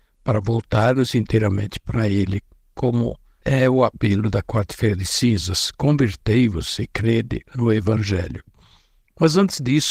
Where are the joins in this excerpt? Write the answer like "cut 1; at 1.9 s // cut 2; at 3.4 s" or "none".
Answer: none